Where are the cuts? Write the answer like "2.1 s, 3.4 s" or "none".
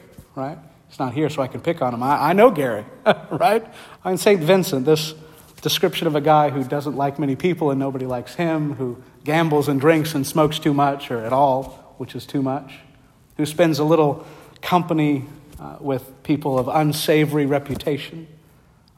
4.0 s